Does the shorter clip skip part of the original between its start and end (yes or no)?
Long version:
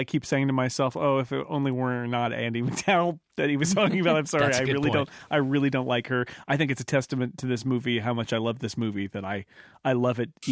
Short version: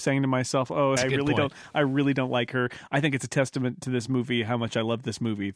yes